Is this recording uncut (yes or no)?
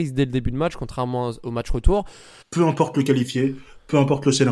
no